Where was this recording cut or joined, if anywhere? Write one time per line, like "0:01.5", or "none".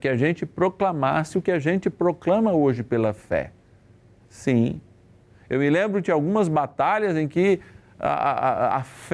none